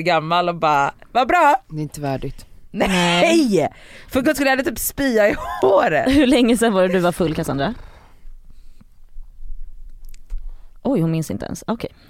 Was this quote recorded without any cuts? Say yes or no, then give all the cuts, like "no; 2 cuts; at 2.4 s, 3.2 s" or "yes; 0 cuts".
yes; 0 cuts